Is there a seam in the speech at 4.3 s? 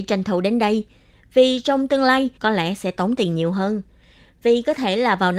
no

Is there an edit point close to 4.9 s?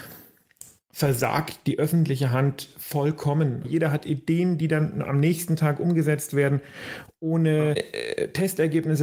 no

